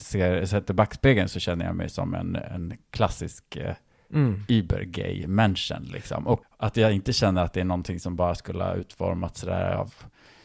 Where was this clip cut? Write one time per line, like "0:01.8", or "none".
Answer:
0:06.4